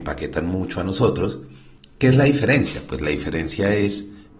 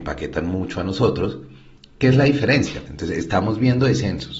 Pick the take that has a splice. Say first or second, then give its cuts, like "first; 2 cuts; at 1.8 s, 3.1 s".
second; 1 cut; at 2.9 s